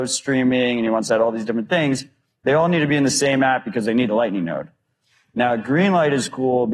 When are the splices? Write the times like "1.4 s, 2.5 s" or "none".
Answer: none